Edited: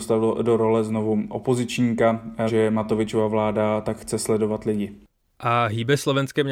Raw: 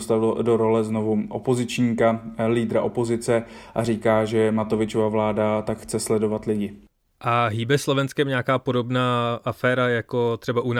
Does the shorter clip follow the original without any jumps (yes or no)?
no